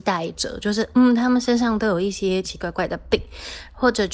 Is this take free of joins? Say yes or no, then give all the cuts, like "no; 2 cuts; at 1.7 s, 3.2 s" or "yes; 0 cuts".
no; 1 cut; at 2.4 s